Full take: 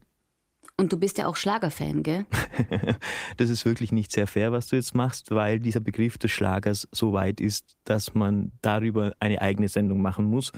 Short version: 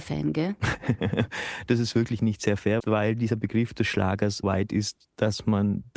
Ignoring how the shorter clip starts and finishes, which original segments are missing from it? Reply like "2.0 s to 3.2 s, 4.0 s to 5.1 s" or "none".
4.5 s to 5.2 s, 6.9 s to 7.1 s